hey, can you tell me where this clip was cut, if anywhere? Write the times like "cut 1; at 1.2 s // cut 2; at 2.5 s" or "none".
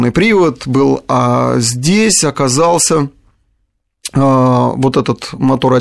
none